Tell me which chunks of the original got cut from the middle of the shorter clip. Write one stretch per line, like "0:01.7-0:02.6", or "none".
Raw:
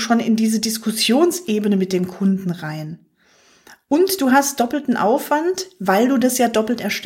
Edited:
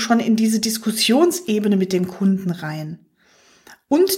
none